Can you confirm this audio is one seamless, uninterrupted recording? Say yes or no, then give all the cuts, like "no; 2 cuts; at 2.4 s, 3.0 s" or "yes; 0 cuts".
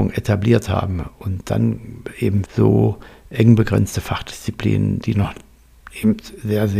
no; 1 cut; at 2.5 s